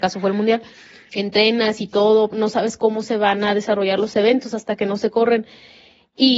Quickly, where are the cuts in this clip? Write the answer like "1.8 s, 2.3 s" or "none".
1.1 s, 2.3 s